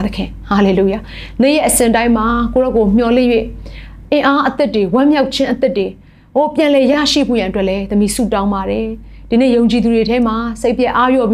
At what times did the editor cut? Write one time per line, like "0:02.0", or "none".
none